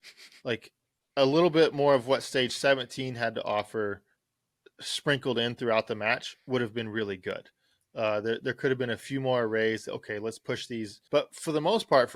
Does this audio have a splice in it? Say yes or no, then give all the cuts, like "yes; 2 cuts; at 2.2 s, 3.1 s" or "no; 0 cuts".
yes; 1 cut; at 11.1 s